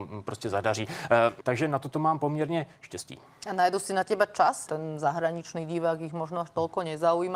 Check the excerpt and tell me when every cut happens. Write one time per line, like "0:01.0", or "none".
0:01.4
0:04.7